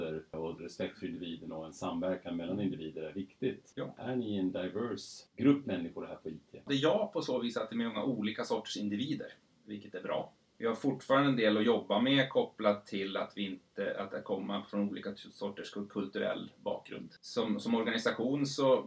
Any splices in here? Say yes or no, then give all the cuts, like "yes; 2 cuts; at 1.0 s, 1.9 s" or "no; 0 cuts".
no; 0 cuts